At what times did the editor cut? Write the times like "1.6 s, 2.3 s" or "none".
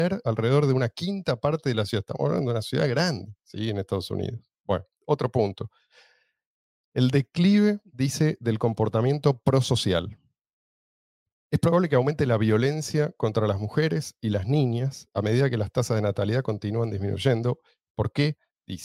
none